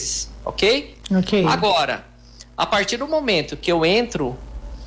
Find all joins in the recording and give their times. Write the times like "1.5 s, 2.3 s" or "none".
none